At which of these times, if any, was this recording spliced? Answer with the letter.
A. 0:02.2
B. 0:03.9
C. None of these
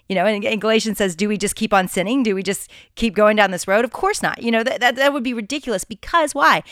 C